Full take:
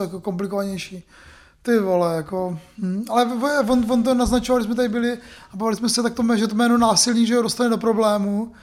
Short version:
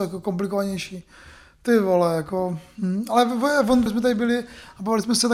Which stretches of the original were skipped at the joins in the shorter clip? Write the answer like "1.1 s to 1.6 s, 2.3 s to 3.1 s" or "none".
3.9 s to 4.6 s